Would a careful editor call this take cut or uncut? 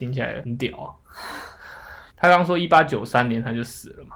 cut